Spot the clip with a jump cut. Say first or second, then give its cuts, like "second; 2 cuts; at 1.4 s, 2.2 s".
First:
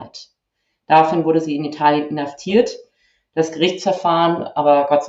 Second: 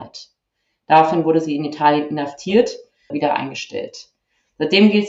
second; 1 cut; at 3.1 s